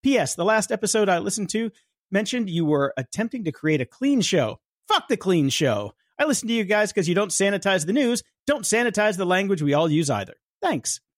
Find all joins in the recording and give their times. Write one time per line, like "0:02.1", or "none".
none